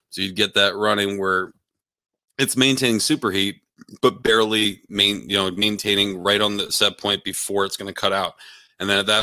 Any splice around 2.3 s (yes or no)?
no